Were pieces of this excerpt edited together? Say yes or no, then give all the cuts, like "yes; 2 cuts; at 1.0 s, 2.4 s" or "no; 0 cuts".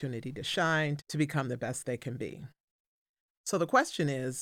yes; 1 cut; at 1.0 s